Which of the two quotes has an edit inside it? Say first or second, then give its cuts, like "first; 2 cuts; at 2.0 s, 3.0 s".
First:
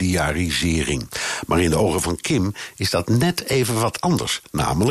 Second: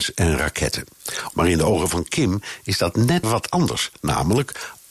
second; 2 cuts; at 1.3 s, 3.2 s